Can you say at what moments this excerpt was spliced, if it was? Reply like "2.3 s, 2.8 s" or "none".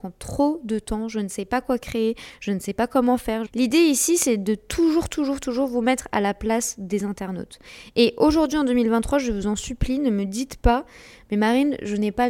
3.5 s